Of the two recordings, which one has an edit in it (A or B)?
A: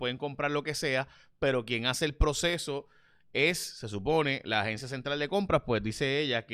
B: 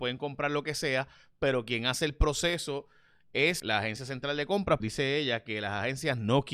B